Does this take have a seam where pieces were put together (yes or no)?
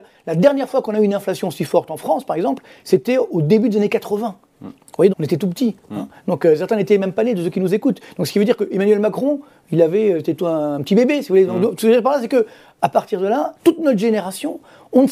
yes